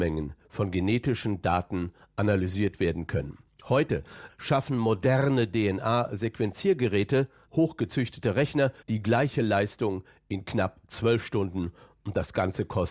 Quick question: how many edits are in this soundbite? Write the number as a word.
three